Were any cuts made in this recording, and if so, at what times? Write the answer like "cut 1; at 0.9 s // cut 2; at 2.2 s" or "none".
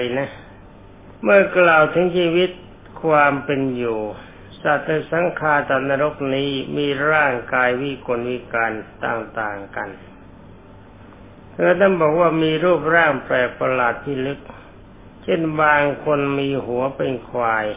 cut 1; at 1.2 s // cut 2; at 15.1 s